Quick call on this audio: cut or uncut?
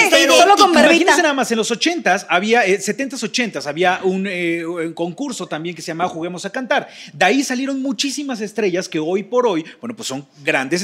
uncut